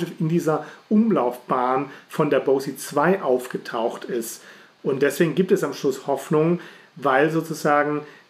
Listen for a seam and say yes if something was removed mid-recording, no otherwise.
yes